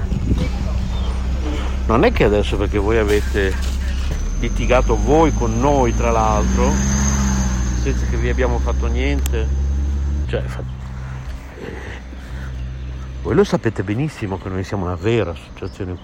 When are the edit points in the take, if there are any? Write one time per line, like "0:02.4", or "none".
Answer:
0:10.2